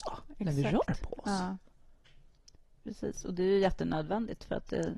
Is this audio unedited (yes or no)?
yes